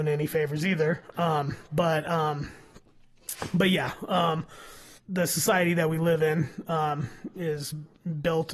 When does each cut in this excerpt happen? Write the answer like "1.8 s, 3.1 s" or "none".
1.1 s, 5.0 s